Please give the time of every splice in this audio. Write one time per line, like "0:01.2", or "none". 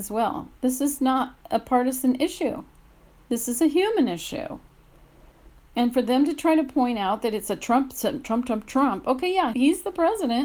0:09.5